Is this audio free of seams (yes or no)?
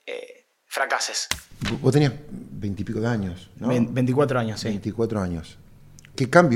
yes